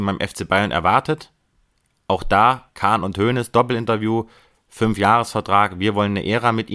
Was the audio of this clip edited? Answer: yes; 1 cut; at 2.7 s

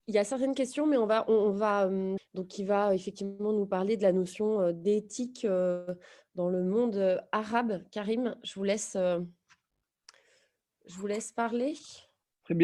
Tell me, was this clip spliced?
yes; 1 cut; at 2.2 s

